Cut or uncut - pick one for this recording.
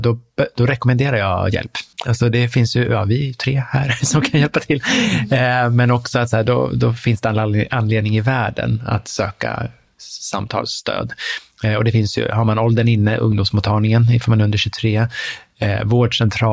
cut